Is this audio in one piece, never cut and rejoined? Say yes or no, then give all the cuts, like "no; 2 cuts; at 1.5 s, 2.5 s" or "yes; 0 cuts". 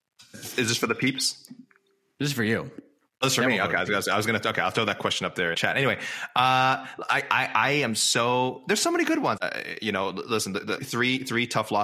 no; 3 cuts; at 5.5 s, 9.4 s, 10.8 s